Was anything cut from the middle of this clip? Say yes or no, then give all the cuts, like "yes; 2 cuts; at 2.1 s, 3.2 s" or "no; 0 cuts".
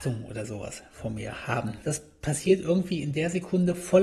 yes; 1 cut; at 1.8 s